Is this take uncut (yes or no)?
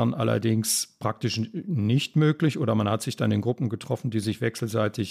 yes